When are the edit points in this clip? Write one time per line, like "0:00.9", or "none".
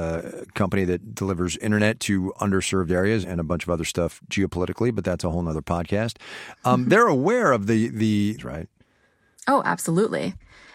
0:03.2
0:08.4

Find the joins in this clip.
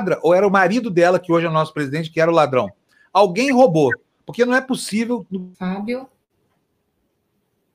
0:05.5

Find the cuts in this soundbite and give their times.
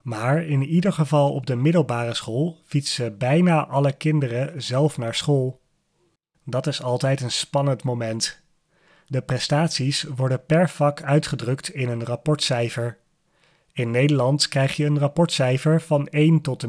0:06.3

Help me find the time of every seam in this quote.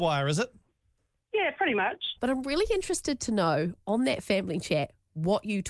0:02.2

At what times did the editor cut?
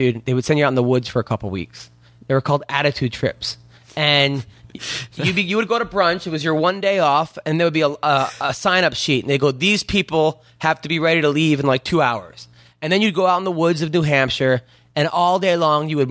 none

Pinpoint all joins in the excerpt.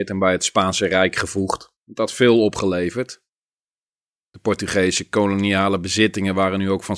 0:01.8

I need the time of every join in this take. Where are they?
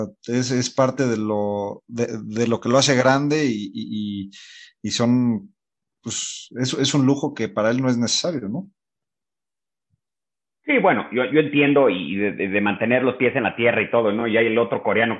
none

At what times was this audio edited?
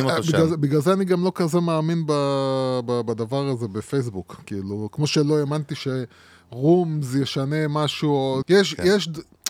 0:08.4

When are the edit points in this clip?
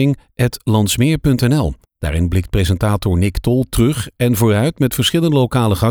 0:01.8

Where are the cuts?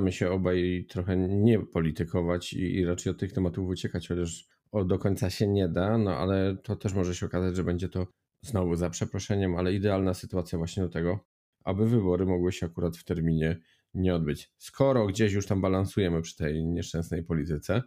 none

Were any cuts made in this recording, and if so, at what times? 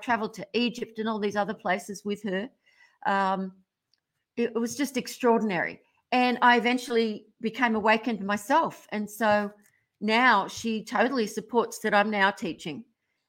none

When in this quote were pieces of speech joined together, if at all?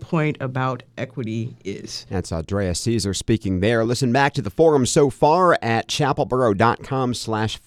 none

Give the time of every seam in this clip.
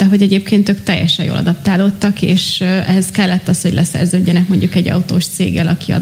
none

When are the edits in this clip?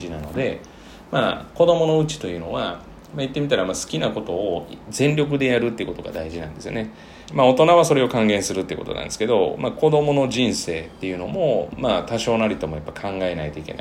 0:07.3
0:09.6

